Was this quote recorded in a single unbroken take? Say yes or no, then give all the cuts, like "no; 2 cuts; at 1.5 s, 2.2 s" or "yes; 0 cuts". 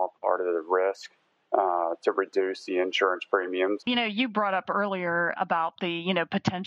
no; 2 cuts; at 3.8 s, 5.3 s